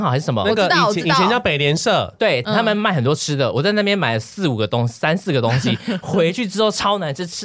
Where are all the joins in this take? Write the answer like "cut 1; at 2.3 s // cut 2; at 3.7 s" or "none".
cut 1; at 2.4 s